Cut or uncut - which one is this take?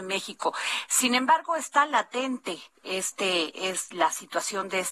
cut